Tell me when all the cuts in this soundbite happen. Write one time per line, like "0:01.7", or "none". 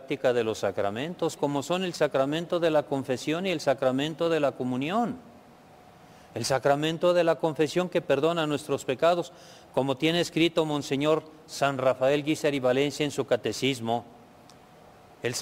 0:01.4